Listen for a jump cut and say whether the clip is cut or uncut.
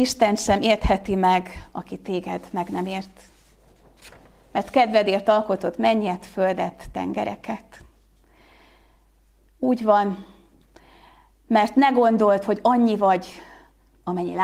uncut